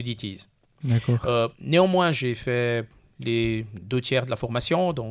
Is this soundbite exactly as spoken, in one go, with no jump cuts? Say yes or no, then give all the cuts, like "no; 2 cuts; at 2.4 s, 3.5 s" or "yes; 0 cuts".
yes; 0 cuts